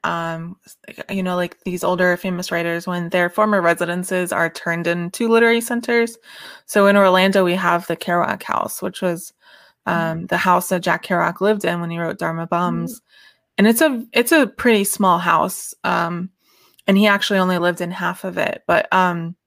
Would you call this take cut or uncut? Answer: uncut